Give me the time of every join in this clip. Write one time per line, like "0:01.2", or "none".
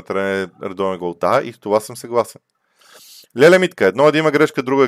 none